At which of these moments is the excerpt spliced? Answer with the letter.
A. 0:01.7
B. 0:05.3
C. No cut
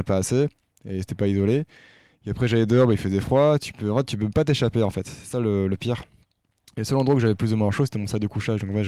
C